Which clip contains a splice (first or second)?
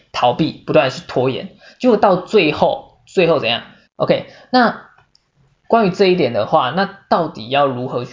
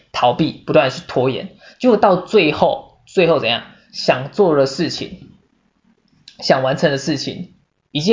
first